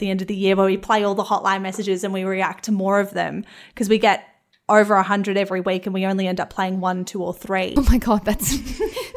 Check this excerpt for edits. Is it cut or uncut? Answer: cut